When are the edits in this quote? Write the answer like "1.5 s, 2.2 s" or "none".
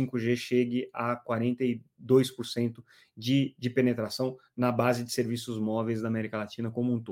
none